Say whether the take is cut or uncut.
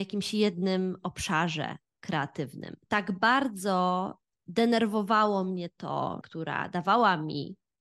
cut